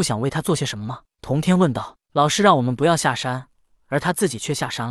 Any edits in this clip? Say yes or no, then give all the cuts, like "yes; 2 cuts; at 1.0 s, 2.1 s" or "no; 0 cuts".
no; 0 cuts